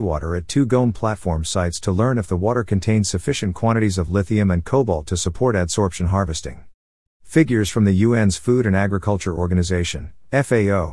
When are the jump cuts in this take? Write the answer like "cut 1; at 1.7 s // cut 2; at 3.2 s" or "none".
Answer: cut 1; at 7.1 s

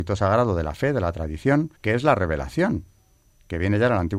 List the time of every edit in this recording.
cut 1; at 1.8 s

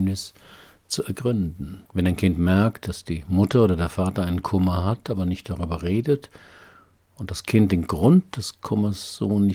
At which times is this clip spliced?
cut 1; at 1.9 s

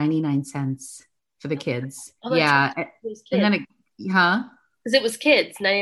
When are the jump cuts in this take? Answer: cut 1; at 2.2 s

